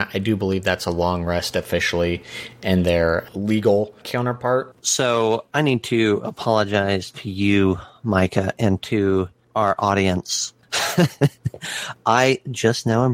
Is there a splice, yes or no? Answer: yes